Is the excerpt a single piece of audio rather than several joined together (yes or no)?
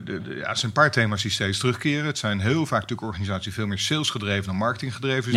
yes